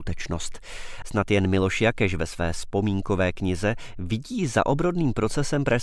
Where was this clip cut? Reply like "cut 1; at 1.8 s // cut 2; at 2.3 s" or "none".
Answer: cut 1; at 1.0 s